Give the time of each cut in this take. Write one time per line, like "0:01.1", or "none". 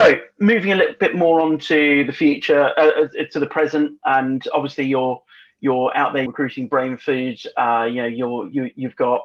0:06.3